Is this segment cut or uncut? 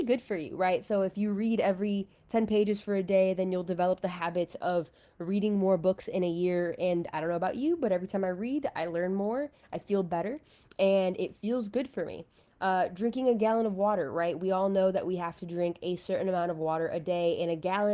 uncut